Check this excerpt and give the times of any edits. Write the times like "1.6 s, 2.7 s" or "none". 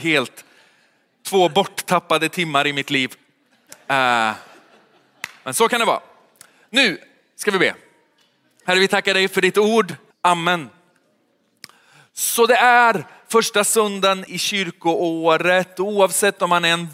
10.1 s, 14.3 s